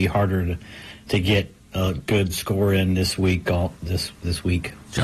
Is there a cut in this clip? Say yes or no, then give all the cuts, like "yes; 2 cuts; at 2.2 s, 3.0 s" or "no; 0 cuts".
yes; 1 cut; at 3.4 s